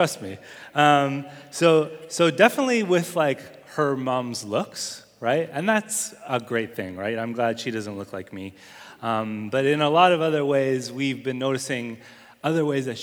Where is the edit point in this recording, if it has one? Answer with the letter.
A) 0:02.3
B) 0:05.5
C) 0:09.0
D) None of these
D